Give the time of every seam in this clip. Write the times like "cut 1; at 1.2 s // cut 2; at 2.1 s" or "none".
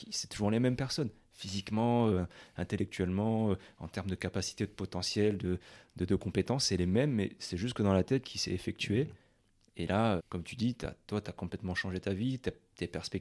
cut 1; at 8.2 s // cut 2; at 10.2 s